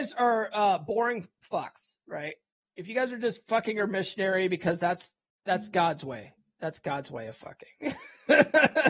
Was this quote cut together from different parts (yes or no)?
no